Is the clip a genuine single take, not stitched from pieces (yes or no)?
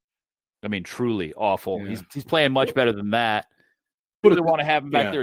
no